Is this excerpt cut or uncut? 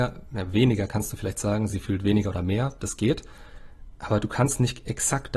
uncut